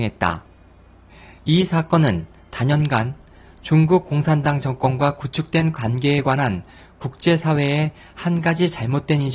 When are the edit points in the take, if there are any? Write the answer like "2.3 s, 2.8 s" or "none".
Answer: none